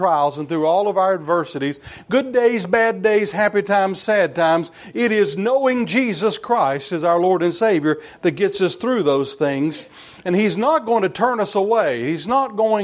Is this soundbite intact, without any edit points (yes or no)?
yes